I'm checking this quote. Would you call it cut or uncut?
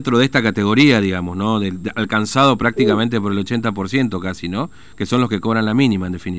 uncut